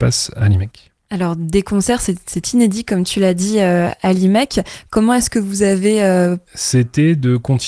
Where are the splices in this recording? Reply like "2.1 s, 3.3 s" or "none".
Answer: 6.4 s